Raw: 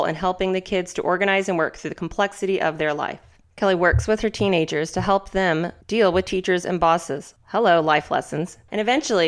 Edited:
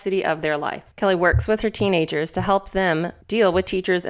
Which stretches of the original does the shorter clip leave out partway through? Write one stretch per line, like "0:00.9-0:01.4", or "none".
0:03.3-0:03.5